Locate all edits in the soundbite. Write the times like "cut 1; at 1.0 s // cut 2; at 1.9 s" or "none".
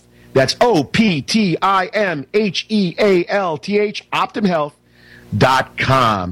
none